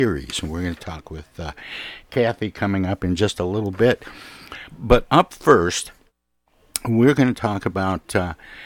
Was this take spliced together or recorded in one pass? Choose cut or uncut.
uncut